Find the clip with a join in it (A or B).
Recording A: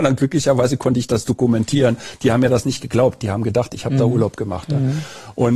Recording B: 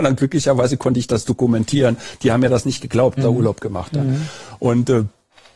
B